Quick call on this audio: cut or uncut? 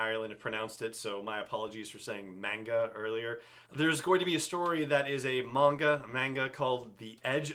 cut